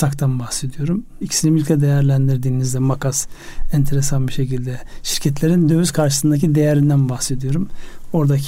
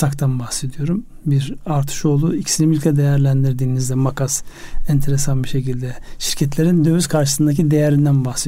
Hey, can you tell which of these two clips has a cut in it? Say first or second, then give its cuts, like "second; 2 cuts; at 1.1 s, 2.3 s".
first; 1 cut; at 1.2 s